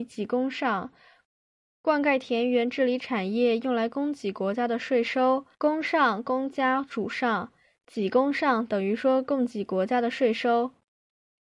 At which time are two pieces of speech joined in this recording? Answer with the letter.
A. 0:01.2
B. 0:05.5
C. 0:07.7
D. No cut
B